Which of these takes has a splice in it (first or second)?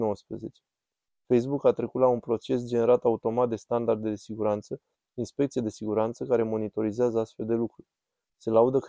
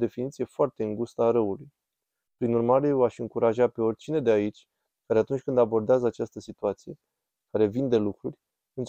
second